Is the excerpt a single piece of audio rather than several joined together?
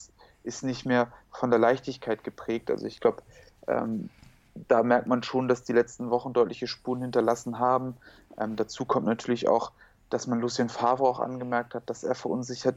yes; 0 cuts

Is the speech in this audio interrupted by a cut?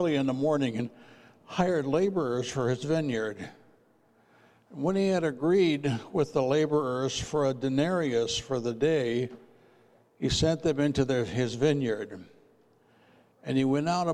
no; 0 cuts

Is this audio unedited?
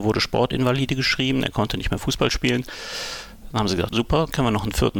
no; 1 cut; at 3.9 s

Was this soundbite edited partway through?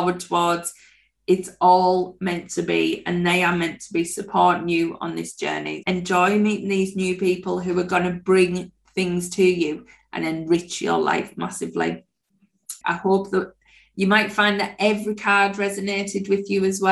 yes; 2 cuts; at 5.8 s, 12.8 s

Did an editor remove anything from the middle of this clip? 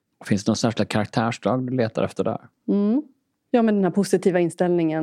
no; 0 cuts

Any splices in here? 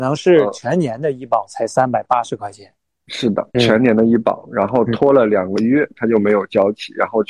yes; 2 cuts; at 3.5 s, 6.0 s

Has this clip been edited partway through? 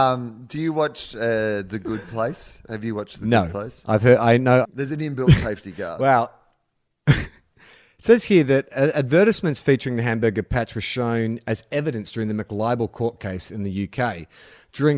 yes; 1 cut; at 4.6 s

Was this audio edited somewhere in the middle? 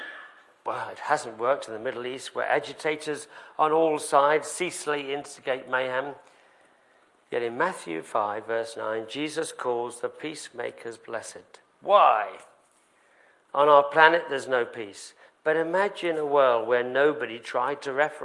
no; 0 cuts

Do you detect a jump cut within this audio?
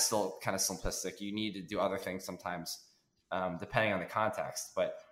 no; 0 cuts

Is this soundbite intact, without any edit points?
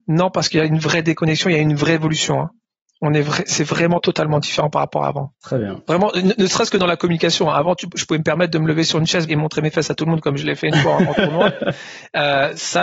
no; 2 cuts; at 5.3 s, 9.3 s

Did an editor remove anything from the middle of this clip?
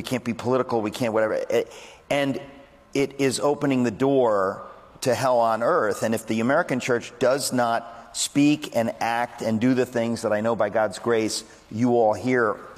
no; 0 cuts

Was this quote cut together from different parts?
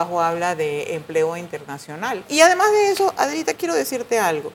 yes; 2 cuts; at 2.3 s, 3.6 s

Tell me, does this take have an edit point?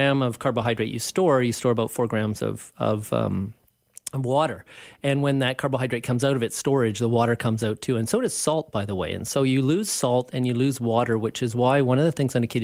no; 0 cuts

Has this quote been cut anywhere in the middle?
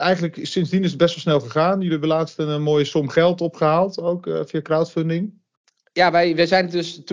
no; 0 cuts

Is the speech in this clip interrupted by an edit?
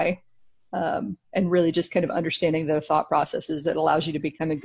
no; 0 cuts

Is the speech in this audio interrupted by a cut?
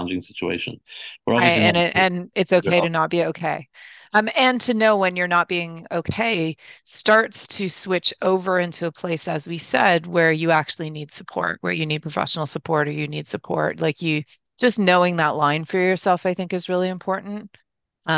no; 0 cuts

